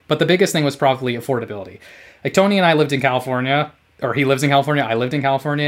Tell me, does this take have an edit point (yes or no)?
no